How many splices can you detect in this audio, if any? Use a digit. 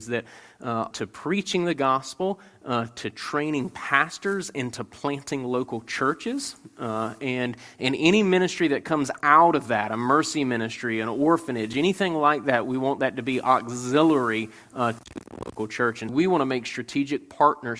2